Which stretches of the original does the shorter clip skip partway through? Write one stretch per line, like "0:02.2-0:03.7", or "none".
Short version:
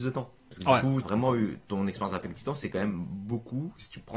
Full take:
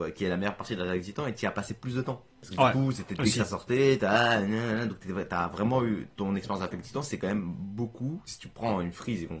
0:02.9-0:05.5